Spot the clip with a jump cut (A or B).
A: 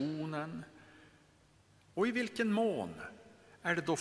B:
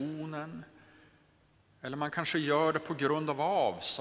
A